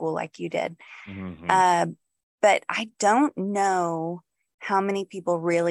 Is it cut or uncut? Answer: uncut